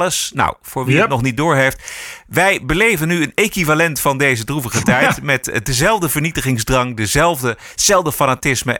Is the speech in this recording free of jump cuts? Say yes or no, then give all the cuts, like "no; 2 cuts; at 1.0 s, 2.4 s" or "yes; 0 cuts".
yes; 0 cuts